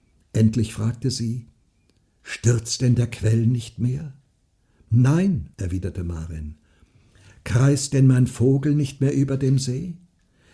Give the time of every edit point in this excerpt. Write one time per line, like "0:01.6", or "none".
0:05.5